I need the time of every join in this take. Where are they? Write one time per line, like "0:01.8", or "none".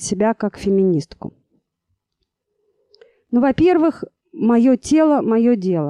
none